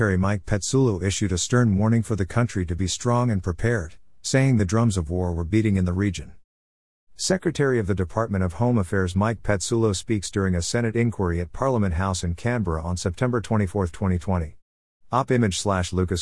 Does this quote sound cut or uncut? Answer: uncut